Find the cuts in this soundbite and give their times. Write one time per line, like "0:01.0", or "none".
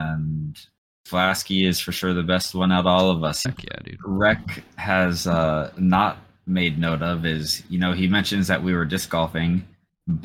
0:03.5